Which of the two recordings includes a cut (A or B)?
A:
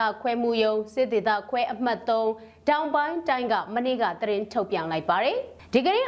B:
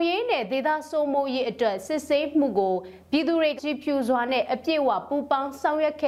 B